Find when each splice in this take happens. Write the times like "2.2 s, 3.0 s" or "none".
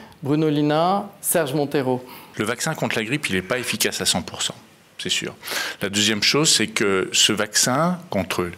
none

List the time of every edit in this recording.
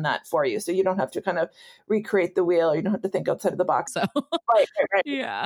3.9 s

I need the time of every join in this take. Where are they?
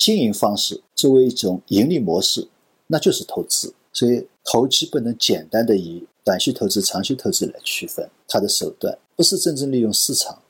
3.9 s, 8.2 s

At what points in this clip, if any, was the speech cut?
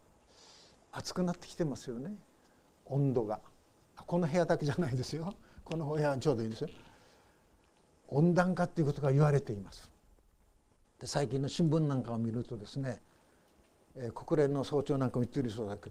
none

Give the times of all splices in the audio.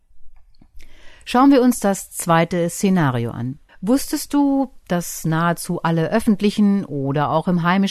3.7 s

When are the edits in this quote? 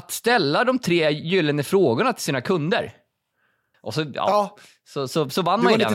3.7 s

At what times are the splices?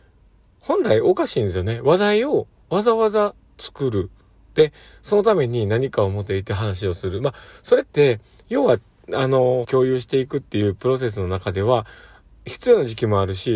9.6 s

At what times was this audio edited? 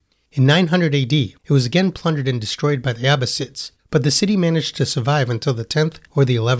1.4 s, 3.8 s

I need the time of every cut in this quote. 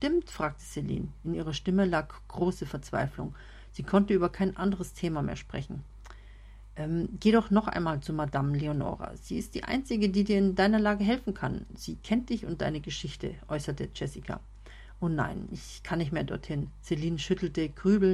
none

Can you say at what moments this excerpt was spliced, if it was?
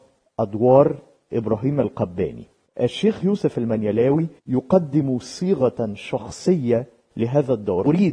4.4 s

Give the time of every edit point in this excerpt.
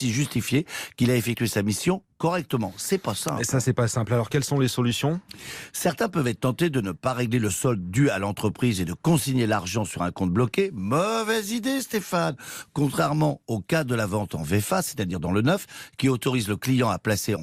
none

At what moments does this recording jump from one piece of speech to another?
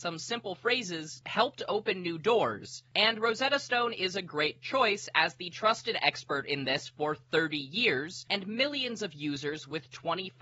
none

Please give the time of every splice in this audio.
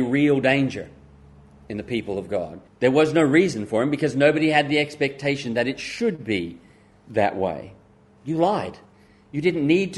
2.7 s, 8.2 s

